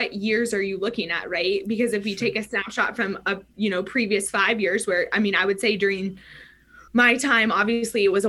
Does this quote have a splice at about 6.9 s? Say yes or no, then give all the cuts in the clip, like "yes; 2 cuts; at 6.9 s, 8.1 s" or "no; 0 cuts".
yes; 1 cut; at 6.9 s